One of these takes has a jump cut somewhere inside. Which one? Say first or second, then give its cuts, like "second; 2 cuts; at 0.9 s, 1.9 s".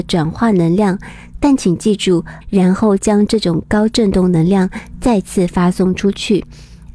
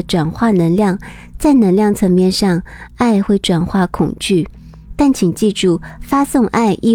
first; 2 cuts; at 1.4 s, 2.4 s